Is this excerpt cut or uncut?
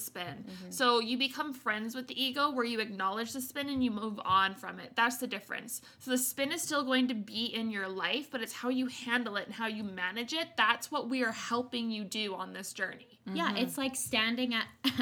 uncut